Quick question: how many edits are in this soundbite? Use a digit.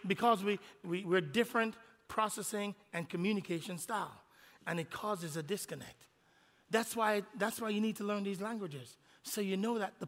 0